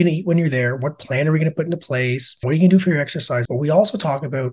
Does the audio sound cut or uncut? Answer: cut